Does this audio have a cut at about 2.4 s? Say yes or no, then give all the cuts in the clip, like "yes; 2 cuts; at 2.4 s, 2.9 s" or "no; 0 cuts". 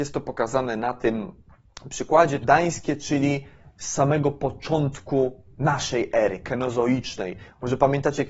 yes; 1 cut; at 2.4 s